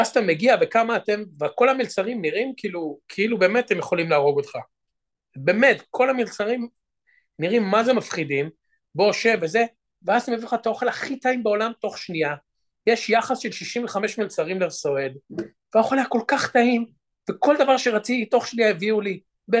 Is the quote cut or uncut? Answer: uncut